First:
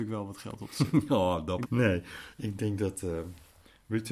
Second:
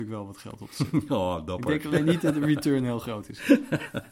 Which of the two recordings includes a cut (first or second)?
first